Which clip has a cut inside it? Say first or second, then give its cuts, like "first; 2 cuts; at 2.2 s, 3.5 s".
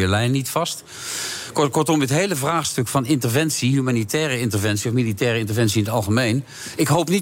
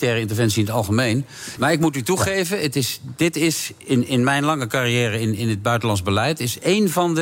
second; 1 cut; at 1.6 s